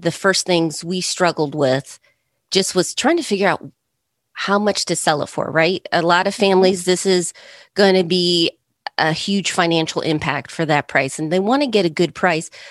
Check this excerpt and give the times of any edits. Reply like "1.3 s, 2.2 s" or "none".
none